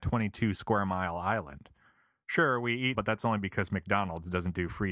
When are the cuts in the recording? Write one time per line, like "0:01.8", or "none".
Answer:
0:02.9